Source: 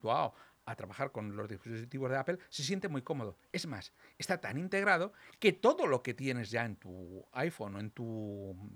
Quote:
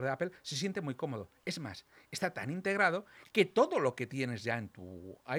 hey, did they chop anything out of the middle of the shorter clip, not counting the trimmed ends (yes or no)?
no